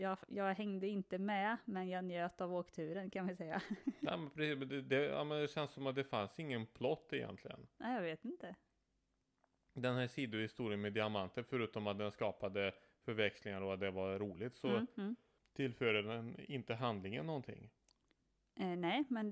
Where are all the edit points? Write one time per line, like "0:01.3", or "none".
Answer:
none